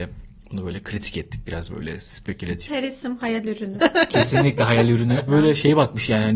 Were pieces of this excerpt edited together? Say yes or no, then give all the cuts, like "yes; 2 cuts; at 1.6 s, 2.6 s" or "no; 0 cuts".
yes; 2 cuts; at 3.8 s, 5.3 s